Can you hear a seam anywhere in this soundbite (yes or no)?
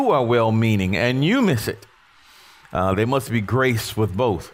no